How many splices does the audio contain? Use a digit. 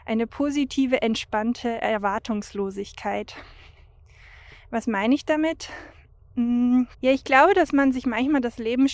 1